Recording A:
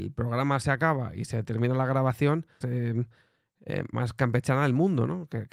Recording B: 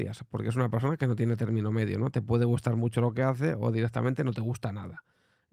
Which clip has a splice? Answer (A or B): A